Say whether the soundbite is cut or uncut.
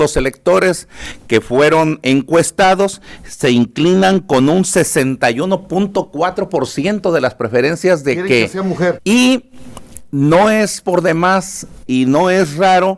cut